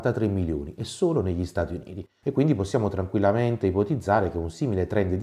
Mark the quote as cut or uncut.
uncut